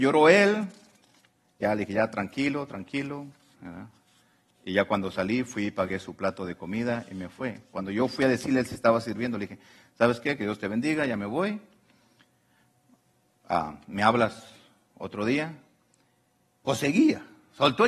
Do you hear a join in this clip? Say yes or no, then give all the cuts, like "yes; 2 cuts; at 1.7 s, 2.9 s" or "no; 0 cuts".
yes; 2 cuts; at 3.5 s, 16.5 s